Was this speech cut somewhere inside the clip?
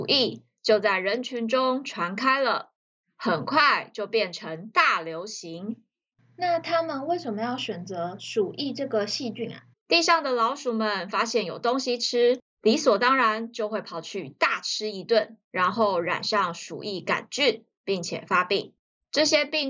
yes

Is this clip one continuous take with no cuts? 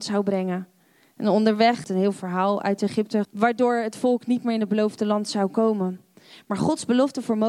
no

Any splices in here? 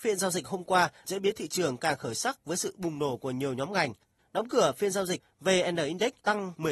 yes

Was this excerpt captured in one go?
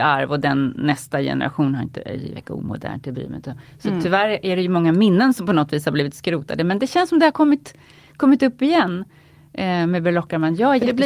yes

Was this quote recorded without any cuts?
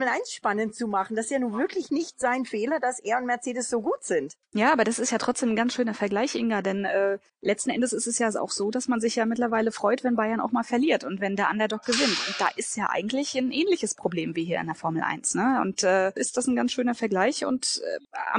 no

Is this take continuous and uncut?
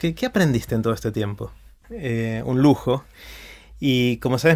no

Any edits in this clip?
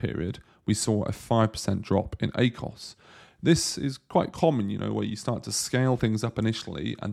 no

